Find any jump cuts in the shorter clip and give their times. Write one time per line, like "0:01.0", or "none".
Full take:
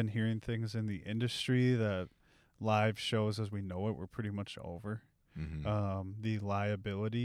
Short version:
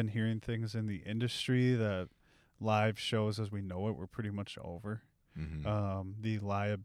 none